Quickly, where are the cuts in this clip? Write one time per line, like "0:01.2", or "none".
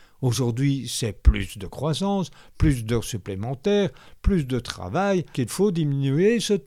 0:05.3